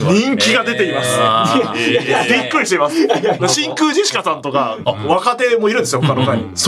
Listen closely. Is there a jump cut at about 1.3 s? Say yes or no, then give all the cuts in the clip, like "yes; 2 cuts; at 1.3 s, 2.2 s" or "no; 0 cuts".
no; 2 cuts; at 3.4 s, 4.8 s